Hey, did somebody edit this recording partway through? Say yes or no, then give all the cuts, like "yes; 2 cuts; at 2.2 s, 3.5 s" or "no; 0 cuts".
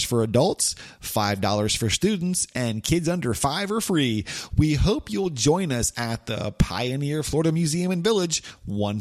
no; 0 cuts